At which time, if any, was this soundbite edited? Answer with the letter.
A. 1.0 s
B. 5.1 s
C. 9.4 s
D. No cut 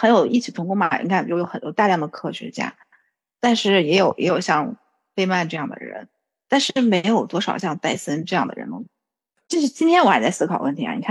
C